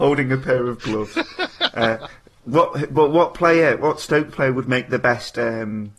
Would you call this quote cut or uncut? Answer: uncut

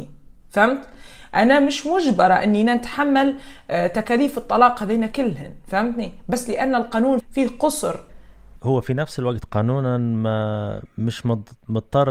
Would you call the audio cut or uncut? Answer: cut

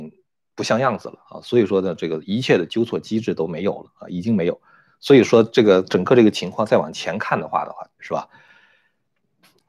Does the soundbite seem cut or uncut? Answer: cut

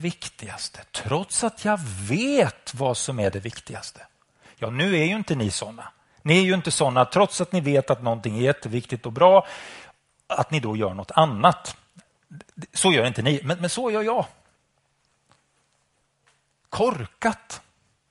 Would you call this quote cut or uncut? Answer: uncut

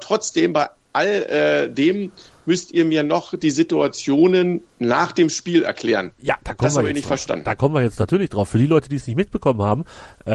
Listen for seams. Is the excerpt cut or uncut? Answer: uncut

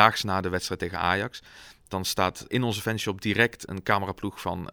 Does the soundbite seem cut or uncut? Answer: cut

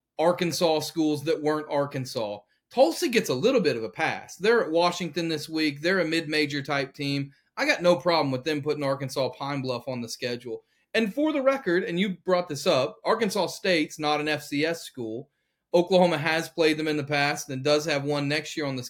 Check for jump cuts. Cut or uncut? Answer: uncut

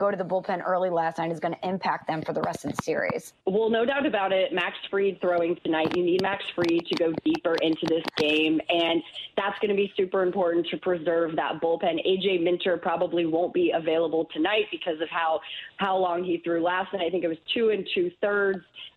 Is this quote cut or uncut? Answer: cut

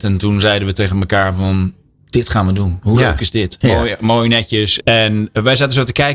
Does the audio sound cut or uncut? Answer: cut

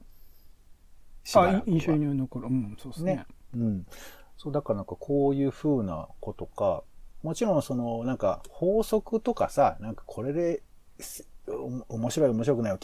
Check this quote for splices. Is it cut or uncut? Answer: cut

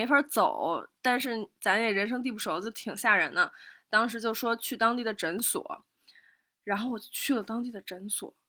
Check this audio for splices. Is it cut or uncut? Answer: uncut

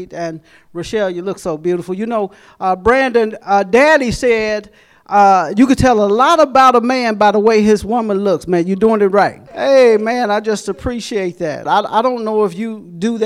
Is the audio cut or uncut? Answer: cut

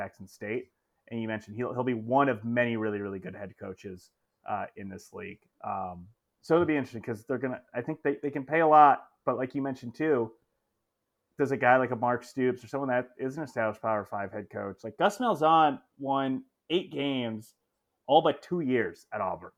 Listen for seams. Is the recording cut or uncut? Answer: uncut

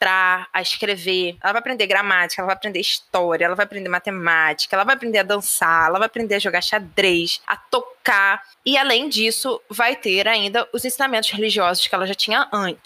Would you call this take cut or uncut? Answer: uncut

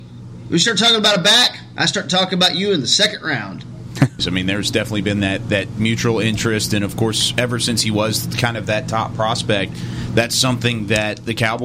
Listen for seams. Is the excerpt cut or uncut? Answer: cut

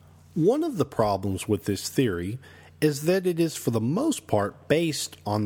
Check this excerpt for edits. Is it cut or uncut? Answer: uncut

